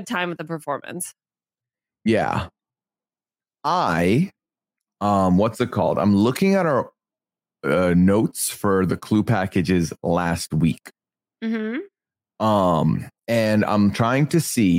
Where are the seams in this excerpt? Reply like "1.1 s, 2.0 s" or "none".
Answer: none